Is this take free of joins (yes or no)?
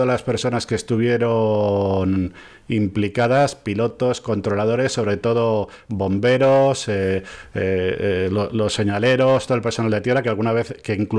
yes